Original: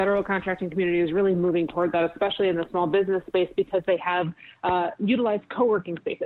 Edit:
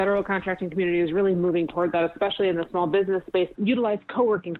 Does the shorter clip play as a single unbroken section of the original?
no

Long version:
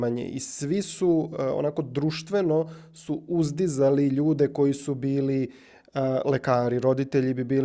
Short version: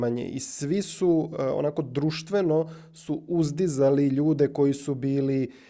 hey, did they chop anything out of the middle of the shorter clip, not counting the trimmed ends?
no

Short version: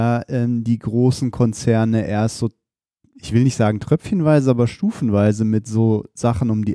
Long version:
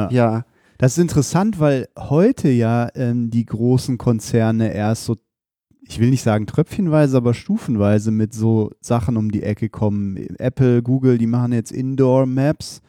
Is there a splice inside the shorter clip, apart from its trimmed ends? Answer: no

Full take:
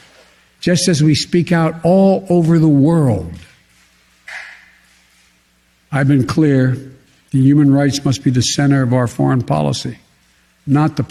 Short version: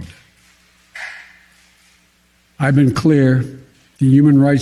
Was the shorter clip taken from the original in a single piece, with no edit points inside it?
yes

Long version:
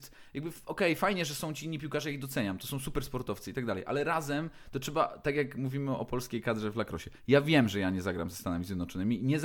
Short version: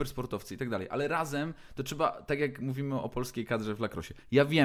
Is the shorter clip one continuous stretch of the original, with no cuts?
yes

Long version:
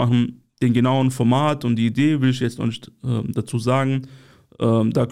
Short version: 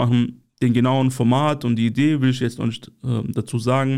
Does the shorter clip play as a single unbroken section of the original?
yes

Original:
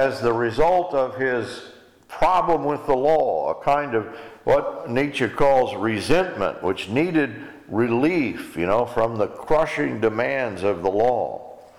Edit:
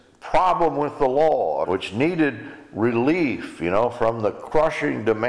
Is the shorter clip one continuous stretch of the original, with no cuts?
no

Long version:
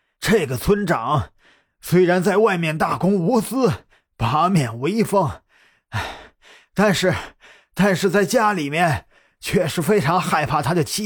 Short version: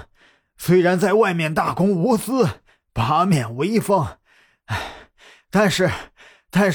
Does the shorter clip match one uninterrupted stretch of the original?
yes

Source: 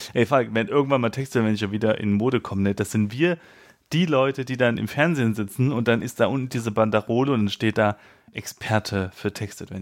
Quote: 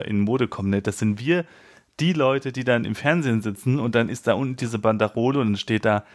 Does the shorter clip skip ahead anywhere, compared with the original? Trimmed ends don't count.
no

